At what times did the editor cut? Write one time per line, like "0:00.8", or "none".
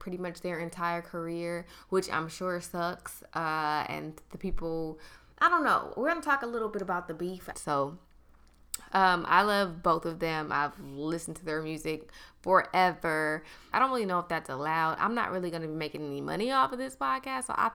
0:07.5
0:13.7